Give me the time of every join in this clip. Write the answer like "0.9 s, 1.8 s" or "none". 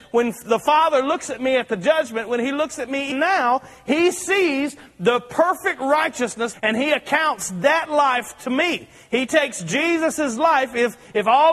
3.1 s, 6.5 s